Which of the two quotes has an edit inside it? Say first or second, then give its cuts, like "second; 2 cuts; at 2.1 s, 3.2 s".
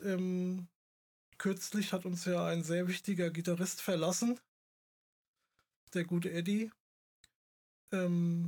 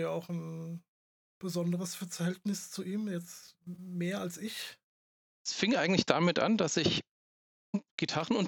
second; 1 cut; at 5.4 s